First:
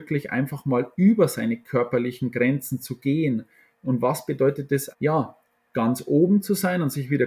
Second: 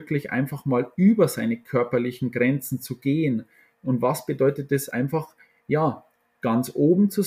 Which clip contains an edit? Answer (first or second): first